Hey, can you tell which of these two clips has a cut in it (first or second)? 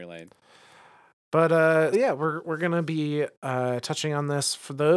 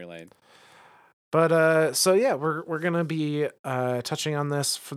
first